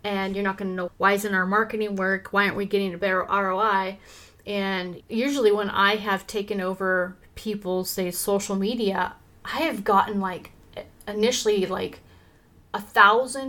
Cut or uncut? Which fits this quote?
uncut